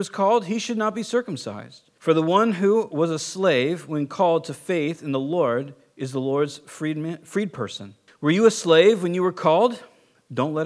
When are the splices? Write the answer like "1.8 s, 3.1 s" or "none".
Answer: 2.0 s, 8.1 s